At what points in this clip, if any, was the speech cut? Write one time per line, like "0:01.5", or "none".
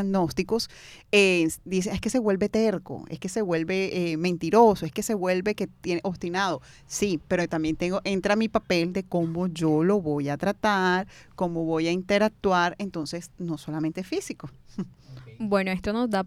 none